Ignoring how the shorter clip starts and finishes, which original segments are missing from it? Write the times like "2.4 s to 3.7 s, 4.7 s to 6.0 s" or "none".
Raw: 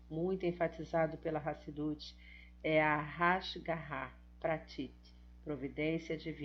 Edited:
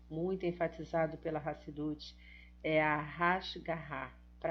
none